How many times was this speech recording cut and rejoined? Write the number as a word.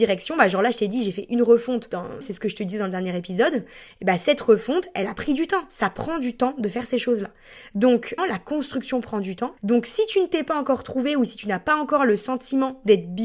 three